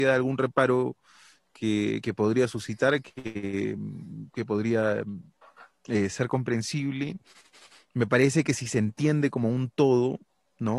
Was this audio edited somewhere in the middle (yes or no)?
no